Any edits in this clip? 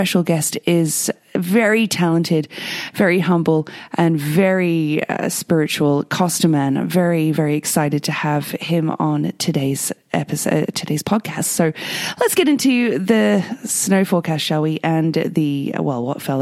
no; 0 cuts

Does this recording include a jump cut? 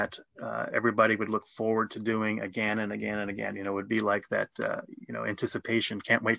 no; 0 cuts

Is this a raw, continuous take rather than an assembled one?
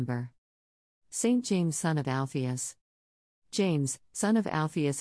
yes; 0 cuts

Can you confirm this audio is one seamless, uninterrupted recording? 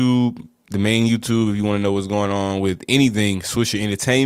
yes; 0 cuts

